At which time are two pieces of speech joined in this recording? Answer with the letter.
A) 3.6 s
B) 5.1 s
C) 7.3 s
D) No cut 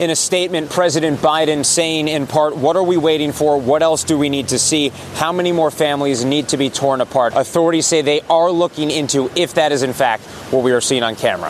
C